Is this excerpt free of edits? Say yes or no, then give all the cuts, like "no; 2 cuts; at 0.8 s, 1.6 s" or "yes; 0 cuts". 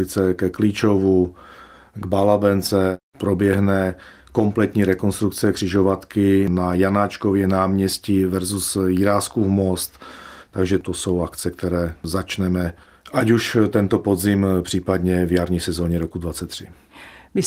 no; 1 cut; at 10.4 s